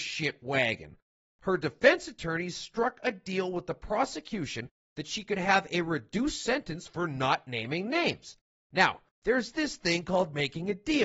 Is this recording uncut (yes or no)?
no